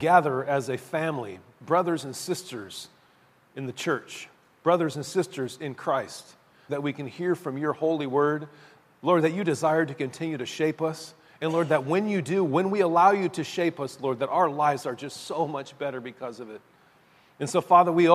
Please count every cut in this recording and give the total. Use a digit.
1